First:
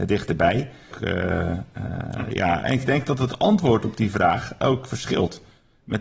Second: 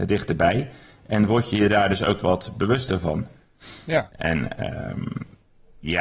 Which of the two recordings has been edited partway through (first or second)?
first